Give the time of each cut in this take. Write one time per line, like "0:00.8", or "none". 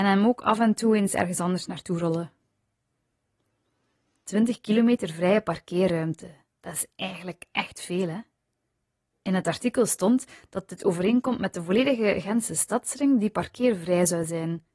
none